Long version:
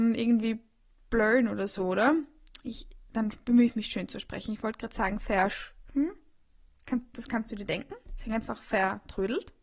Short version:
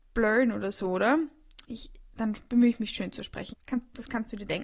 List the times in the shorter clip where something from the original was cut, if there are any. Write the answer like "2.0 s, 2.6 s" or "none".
3.5 s